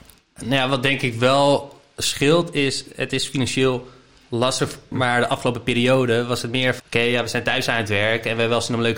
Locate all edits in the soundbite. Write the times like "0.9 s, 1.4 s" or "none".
4.9 s, 6.8 s